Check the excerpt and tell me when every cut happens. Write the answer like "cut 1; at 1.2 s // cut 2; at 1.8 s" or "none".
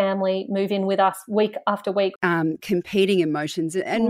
cut 1; at 2.2 s

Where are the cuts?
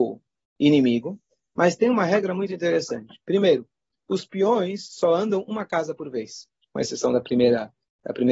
none

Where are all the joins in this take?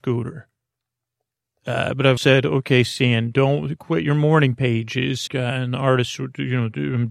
cut 1; at 2.2 s // cut 2; at 5.3 s

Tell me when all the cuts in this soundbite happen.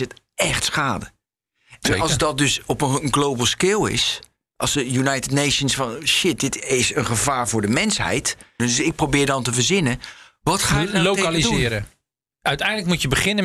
cut 1; at 8.6 s

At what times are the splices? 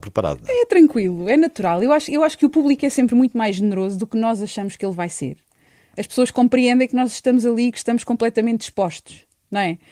none

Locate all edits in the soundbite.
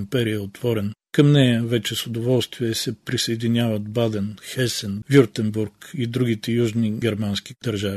cut 1; at 5.0 s

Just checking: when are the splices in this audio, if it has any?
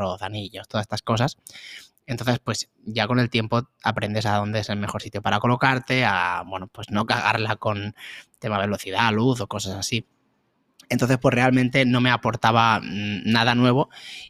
none

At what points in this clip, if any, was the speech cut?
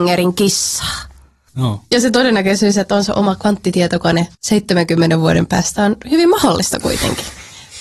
cut 1; at 1.5 s // cut 2; at 4.3 s

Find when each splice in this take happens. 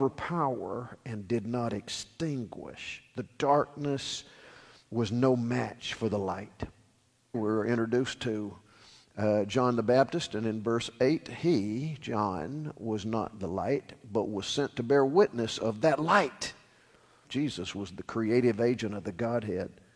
cut 1; at 7.3 s // cut 2; at 17.2 s

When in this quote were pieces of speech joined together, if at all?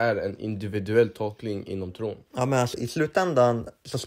cut 1; at 2.7 s

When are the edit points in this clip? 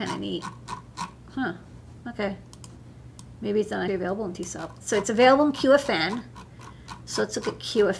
cut 1; at 1.3 s // cut 2; at 3.9 s

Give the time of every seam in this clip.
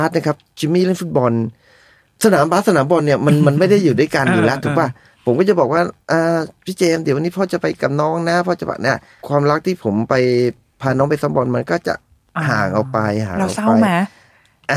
none

